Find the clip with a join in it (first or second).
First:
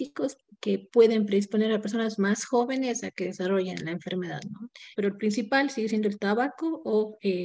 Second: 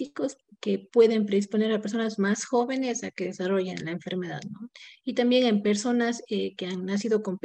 first